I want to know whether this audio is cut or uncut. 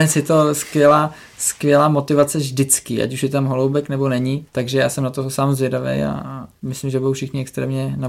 cut